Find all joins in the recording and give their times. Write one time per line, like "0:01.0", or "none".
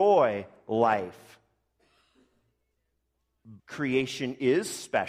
0:03.6